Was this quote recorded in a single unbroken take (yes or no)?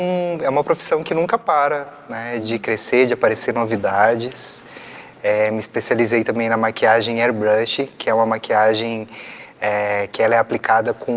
yes